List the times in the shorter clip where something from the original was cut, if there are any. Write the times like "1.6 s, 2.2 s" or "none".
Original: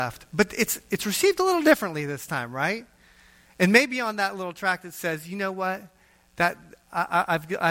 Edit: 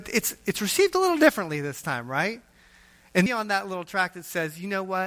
3.3 s